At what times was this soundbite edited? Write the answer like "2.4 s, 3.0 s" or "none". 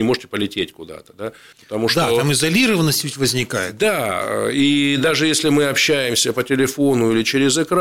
1.5 s